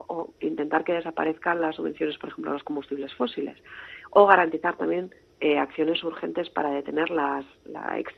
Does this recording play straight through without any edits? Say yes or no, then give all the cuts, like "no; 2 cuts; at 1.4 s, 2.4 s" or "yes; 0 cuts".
yes; 0 cuts